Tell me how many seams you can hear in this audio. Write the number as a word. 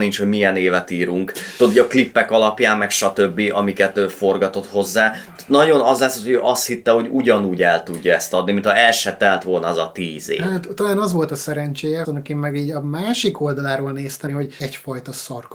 two